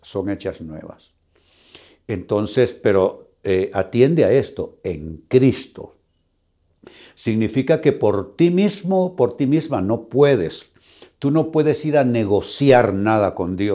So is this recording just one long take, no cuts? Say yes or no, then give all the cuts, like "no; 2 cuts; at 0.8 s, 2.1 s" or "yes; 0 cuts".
yes; 0 cuts